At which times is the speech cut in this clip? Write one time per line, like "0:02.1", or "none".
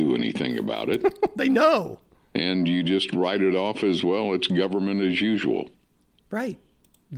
none